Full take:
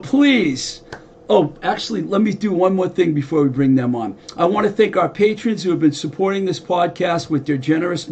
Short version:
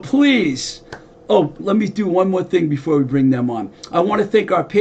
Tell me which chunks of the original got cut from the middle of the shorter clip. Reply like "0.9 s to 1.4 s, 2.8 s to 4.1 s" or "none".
1.6 s to 2.0 s